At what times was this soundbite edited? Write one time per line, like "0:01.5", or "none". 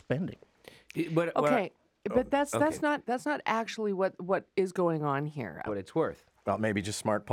0:03.0
0:05.7